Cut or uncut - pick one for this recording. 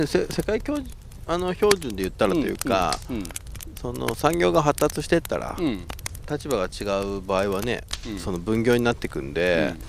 uncut